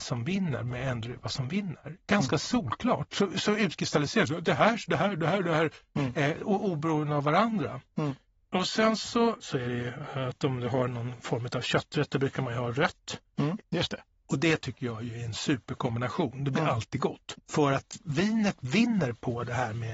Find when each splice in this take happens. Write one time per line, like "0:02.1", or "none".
0:09.4
0:13.6
0:17.3